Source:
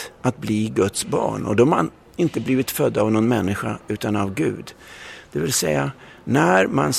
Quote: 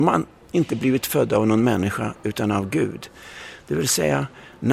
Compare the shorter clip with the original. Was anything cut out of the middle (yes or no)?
no